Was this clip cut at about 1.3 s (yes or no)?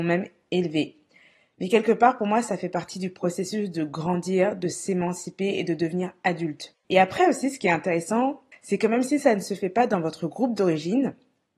no